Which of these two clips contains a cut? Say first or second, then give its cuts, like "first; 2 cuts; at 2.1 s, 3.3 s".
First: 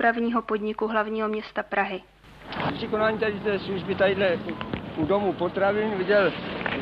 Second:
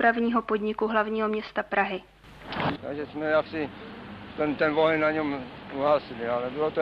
second; 1 cut; at 2.8 s